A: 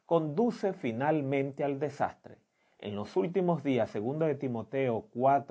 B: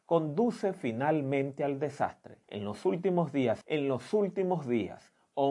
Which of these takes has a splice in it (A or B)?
B